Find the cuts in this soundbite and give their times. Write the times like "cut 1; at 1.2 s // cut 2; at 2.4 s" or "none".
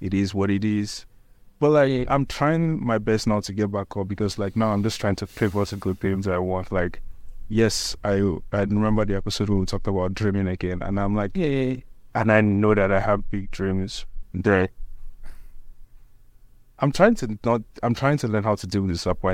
cut 1; at 12.1 s // cut 2; at 14.2 s